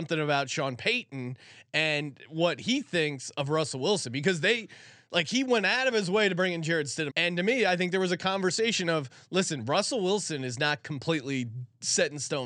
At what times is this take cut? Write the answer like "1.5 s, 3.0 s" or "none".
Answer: 7.1 s